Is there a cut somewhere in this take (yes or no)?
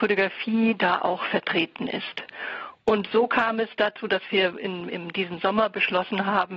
no